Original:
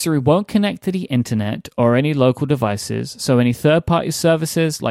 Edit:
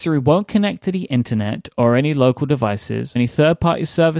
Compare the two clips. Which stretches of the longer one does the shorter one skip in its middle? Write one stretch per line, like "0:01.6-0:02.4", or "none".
0:03.2-0:03.4